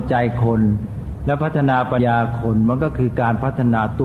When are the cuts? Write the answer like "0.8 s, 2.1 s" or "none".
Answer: 2.0 s